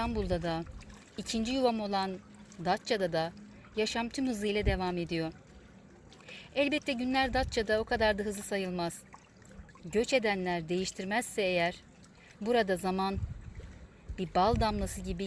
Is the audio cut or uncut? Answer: uncut